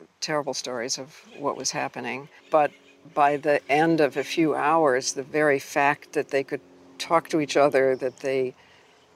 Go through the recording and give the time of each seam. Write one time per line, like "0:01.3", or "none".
none